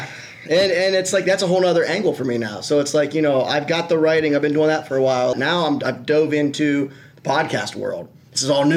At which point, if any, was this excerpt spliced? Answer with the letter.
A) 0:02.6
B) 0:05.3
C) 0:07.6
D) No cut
B